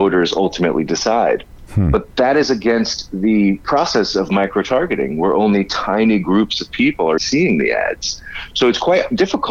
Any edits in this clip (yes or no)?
yes